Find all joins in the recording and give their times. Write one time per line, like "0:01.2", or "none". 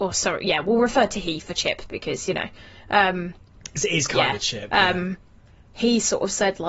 none